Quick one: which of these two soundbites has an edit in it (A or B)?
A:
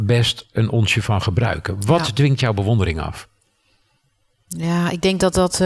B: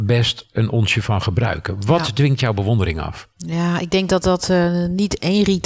B